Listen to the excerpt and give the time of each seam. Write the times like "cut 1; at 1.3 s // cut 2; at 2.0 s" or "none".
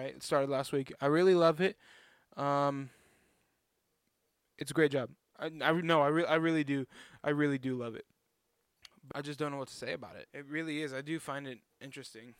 cut 1; at 9.1 s // cut 2; at 10.3 s